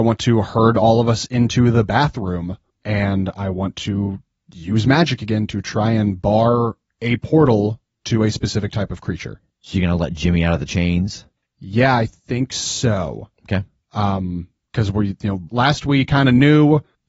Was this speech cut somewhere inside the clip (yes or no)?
yes